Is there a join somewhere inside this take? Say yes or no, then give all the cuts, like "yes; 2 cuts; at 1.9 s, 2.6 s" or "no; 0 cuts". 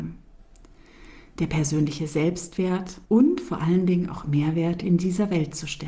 yes; 1 cut; at 3.0 s